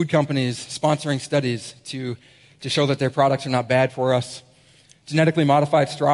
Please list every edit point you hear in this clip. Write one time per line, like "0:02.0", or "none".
none